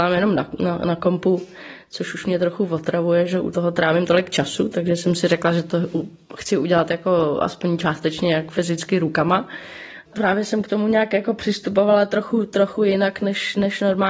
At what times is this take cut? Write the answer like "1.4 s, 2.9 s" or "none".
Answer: 10.0 s